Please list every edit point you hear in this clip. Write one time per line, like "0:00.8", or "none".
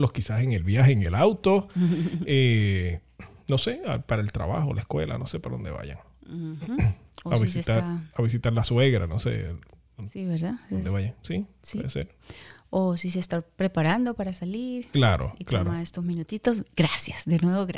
none